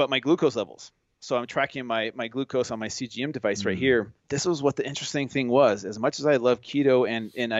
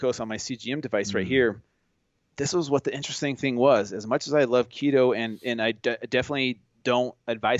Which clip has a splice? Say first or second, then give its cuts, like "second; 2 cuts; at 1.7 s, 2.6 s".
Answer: first; 1 cut; at 4.2 s